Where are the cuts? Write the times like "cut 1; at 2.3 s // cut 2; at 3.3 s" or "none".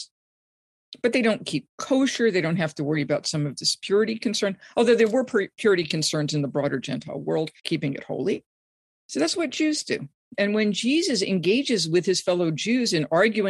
cut 1; at 7.6 s // cut 2; at 10.3 s